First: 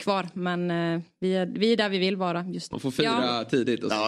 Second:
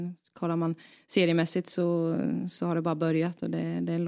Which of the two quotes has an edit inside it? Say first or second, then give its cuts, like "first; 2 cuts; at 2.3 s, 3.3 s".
first; 1 cut; at 2.7 s